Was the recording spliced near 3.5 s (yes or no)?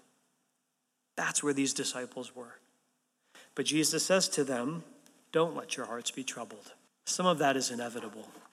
no